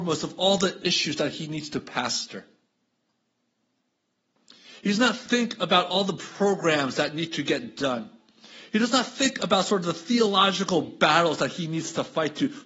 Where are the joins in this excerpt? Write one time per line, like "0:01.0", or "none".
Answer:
none

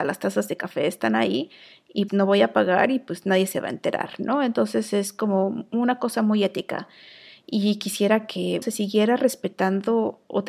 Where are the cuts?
0:02.1
0:08.6

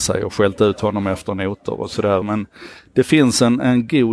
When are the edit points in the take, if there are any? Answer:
0:02.2

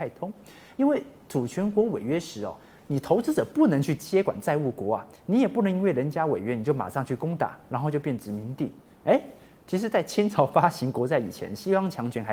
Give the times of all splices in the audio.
none

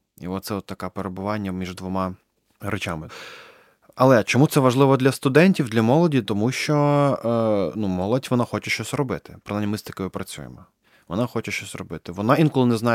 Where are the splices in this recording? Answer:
none

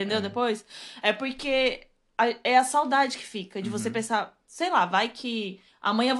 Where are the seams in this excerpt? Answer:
none

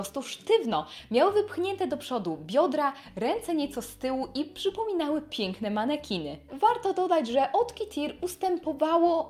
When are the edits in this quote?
0:06.5

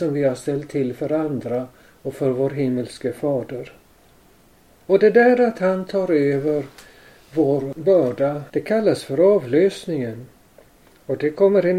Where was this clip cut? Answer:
0:08.5

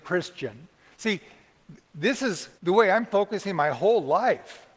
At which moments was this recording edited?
0:02.6

